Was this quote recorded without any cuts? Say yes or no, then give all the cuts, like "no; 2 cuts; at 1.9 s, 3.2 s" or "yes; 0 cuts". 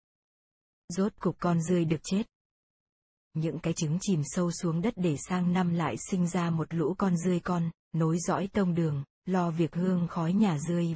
no; 1 cut; at 3.1 s